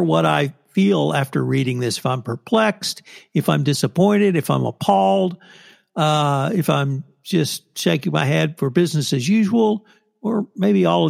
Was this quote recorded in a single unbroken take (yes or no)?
yes